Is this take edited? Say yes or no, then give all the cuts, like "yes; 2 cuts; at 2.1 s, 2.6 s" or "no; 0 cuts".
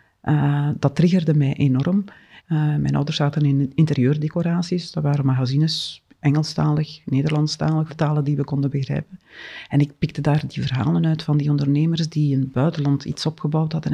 yes; 2 cuts; at 2.4 s, 7.9 s